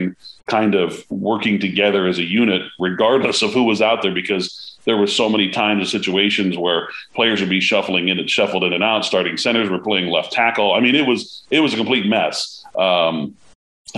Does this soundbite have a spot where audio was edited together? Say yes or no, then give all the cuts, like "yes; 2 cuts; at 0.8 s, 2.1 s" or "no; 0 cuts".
no; 0 cuts